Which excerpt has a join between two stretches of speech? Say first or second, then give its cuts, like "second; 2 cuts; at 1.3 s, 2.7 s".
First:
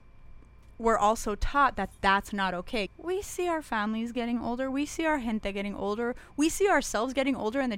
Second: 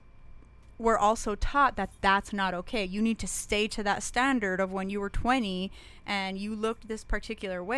first; 1 cut; at 2.9 s